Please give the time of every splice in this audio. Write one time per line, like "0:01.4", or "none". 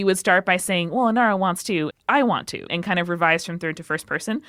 0:01.9